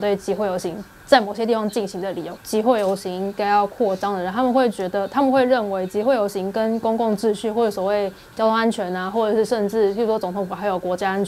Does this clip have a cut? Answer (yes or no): yes